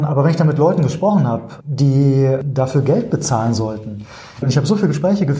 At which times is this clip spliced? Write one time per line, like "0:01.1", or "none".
0:01.6
0:04.4